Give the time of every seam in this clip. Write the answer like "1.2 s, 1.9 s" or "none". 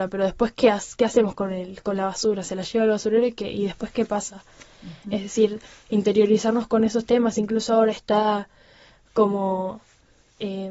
none